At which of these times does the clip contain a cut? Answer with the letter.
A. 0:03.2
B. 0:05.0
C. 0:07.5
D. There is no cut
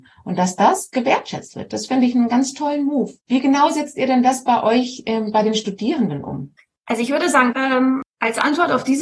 C